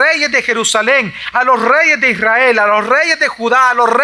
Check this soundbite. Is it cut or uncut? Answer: uncut